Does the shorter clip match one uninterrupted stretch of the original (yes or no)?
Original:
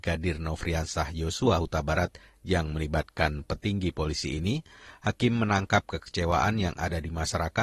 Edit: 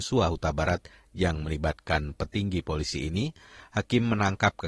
yes